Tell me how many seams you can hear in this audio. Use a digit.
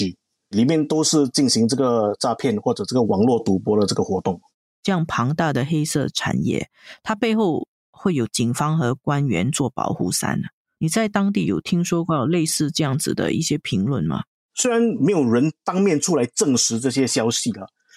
0